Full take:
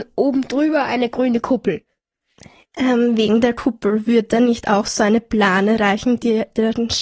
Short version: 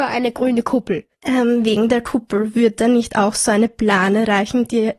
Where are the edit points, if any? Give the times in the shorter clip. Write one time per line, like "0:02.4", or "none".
0:01.1